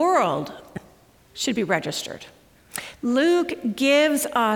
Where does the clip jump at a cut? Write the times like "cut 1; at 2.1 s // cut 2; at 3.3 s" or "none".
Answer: cut 1; at 2.9 s